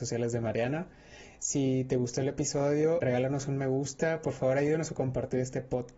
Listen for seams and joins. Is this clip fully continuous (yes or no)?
no